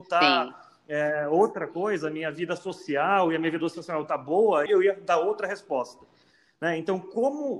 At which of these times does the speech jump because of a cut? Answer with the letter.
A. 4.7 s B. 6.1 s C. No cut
A